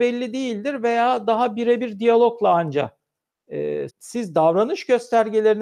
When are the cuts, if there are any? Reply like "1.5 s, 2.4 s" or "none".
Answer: 3.9 s